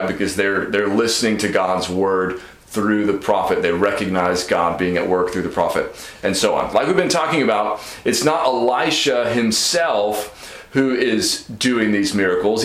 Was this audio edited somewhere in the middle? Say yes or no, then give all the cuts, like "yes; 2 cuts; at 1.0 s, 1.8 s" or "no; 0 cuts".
yes; 1 cut; at 6.7 s